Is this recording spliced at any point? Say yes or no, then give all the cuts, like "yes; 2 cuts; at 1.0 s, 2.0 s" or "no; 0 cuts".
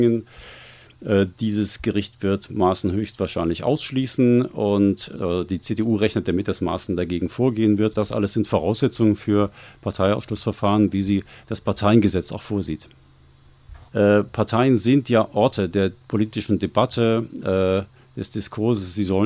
yes; 3 cuts; at 5.1 s, 7.9 s, 13.9 s